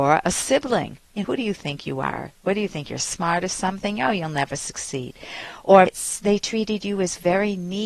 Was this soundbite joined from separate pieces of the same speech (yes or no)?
yes